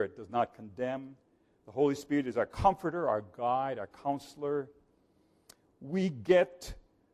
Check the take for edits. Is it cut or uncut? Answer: cut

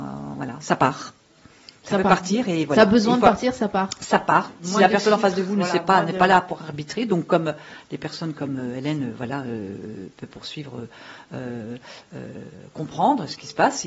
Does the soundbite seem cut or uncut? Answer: uncut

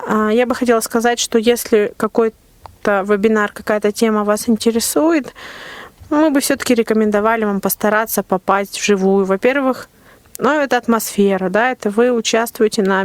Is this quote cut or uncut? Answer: uncut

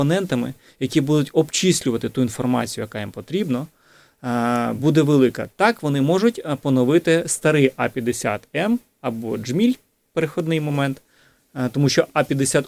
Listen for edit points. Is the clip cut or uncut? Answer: uncut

